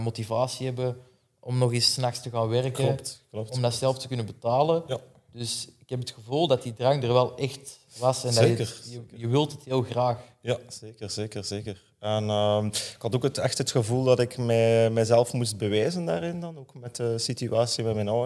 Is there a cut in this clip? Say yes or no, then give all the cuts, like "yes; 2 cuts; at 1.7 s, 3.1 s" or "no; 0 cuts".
no; 0 cuts